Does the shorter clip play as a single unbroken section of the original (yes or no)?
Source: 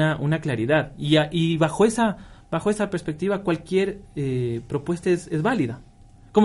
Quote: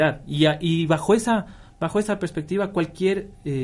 yes